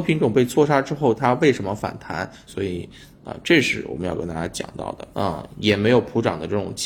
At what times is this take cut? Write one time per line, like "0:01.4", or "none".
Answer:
0:02.5
0:05.1